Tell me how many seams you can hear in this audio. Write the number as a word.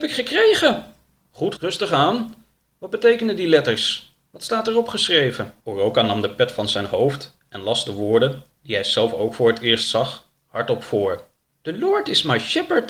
two